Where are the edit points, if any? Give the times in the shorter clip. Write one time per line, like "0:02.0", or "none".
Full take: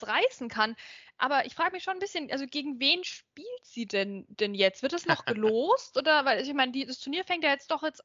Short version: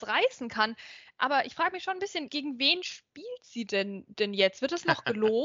0:02.3